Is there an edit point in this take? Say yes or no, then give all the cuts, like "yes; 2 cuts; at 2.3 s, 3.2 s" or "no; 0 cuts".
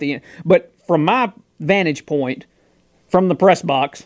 no; 0 cuts